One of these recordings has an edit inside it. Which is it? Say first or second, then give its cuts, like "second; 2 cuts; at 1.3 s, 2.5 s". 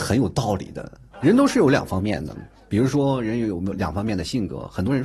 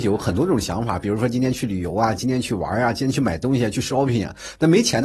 first; 1 cut; at 1.1 s